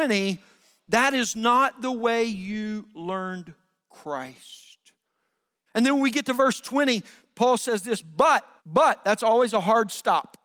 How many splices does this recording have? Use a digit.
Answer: 2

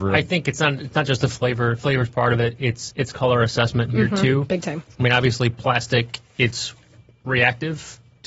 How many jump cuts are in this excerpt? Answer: 0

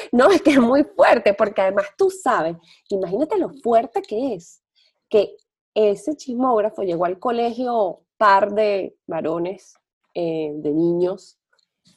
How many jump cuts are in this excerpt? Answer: 0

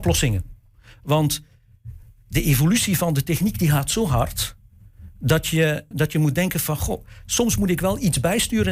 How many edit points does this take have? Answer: 1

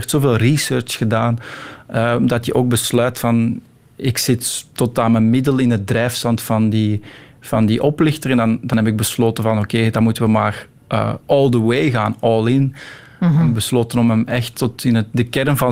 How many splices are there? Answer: 0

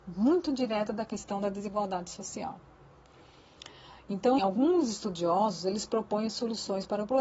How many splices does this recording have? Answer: 1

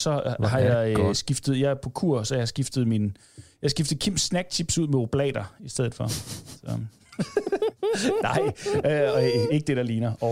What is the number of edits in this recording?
0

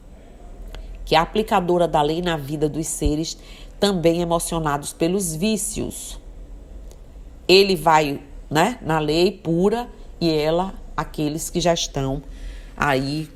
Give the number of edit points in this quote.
0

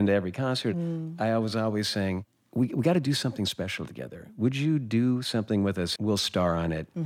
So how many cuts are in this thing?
1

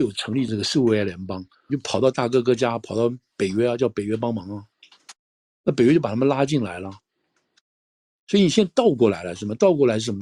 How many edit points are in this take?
1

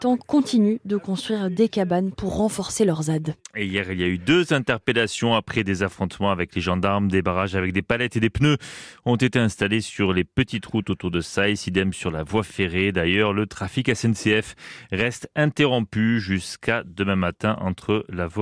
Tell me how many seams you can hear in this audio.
0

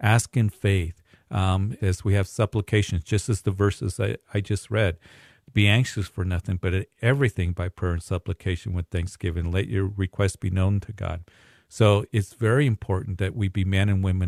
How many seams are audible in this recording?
1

